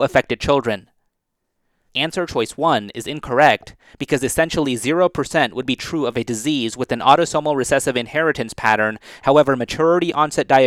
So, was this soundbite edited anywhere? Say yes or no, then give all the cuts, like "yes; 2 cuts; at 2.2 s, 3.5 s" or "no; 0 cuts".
yes; 1 cut; at 1.9 s